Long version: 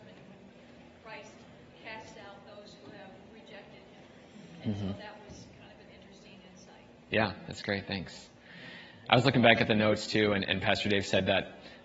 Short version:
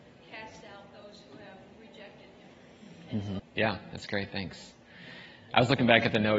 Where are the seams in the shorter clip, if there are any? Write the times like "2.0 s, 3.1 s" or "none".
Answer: 3.4 s